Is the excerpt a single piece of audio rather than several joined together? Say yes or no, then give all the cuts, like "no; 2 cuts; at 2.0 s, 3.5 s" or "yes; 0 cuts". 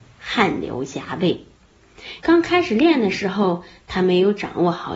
no; 1 cut; at 2.2 s